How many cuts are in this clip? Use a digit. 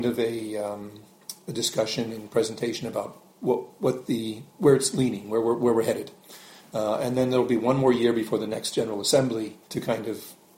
1